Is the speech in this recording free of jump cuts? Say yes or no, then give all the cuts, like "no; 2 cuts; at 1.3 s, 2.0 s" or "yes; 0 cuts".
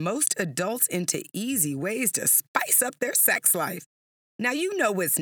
yes; 0 cuts